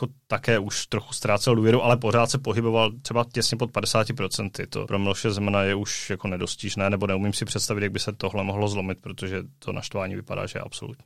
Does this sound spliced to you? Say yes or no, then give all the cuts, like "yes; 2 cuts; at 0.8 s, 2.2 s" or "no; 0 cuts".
yes; 1 cut; at 4.9 s